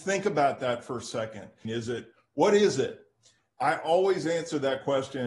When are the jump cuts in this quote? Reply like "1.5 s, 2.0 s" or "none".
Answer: 1.6 s